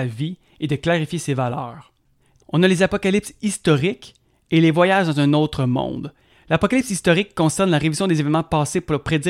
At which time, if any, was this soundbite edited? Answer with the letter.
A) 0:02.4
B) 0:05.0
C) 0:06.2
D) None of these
A